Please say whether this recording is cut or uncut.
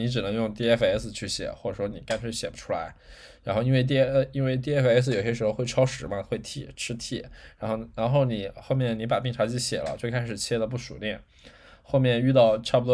uncut